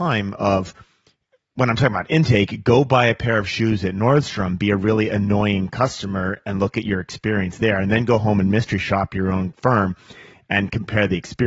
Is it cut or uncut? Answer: uncut